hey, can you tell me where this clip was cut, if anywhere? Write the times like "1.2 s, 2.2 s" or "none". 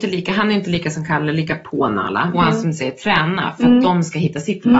2.3 s

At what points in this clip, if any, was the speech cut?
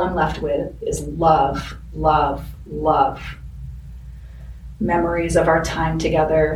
none

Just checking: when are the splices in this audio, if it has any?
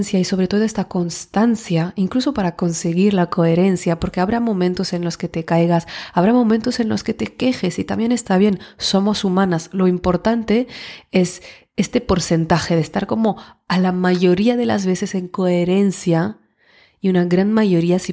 none

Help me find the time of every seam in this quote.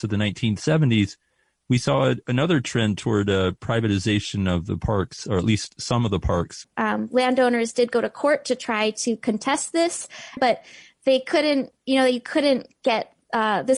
6.6 s, 10.4 s

